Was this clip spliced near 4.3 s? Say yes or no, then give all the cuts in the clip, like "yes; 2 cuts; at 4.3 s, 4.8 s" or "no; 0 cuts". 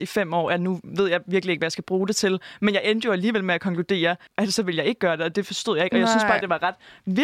yes; 1 cut; at 4.3 s